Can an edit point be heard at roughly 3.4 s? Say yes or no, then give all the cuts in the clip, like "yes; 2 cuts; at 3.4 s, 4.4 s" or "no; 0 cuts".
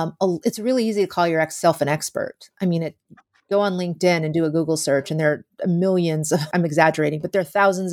no; 1 cut; at 6.5 s